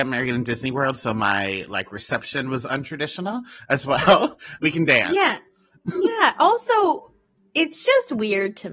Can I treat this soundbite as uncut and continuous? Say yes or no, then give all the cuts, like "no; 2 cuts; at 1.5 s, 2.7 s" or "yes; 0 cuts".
no; 1 cut; at 4.6 s